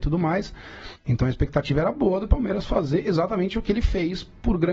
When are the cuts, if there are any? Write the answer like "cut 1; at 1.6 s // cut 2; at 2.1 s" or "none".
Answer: cut 1; at 1.0 s